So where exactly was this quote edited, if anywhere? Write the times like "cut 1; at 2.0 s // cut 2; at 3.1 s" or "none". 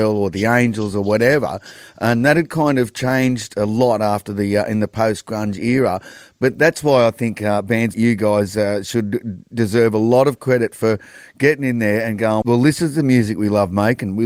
cut 1; at 7.9 s // cut 2; at 12.4 s